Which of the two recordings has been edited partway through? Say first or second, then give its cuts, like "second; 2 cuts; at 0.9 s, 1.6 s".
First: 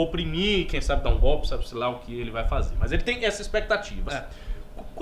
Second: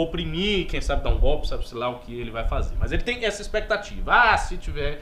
first; 1 cut; at 4.1 s